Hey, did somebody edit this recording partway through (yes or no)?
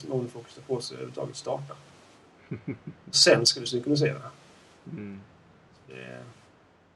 no